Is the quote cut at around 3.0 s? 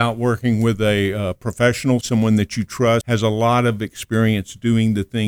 yes; 2 cuts; at 2.0 s, 3.0 s

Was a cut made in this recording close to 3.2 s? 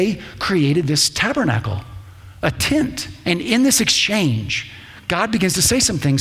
yes; 1 cut; at 3.2 s

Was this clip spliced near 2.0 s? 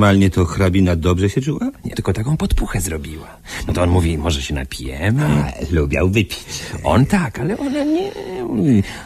yes; 1 cut; at 2.0 s

